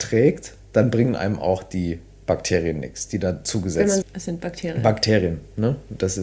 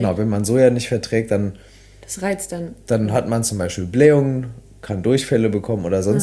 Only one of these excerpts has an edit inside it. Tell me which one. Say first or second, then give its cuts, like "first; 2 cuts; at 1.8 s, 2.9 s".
first; 1 cut; at 4.0 s